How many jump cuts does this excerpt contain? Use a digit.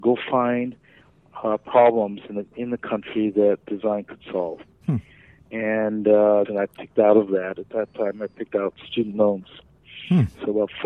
1